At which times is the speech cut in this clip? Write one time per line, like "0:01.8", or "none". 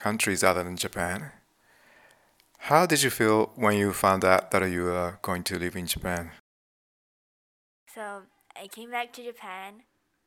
none